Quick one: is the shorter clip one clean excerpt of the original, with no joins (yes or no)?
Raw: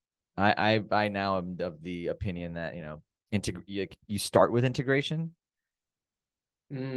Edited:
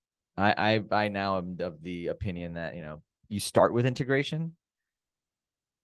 no